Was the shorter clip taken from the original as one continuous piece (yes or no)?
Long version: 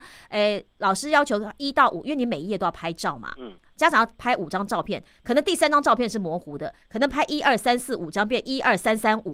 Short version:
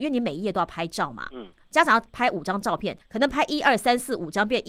no